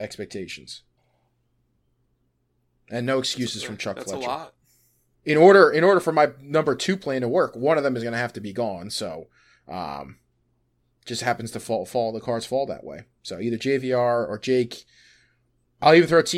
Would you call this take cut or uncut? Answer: cut